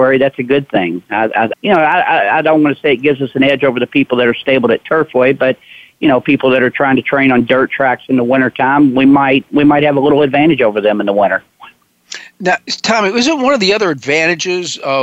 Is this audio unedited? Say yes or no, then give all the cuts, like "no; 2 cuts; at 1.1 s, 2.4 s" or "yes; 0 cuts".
no; 1 cut; at 1.5 s